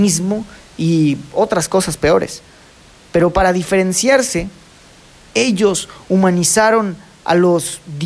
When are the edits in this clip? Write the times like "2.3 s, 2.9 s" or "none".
none